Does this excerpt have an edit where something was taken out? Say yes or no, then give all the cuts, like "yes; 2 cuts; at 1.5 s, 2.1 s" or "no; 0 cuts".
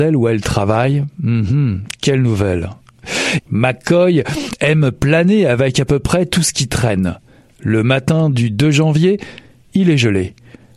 yes; 1 cut; at 3.4 s